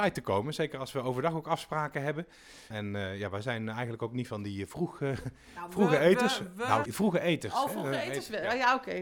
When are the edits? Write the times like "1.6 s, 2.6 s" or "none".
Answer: 2.7 s, 6.9 s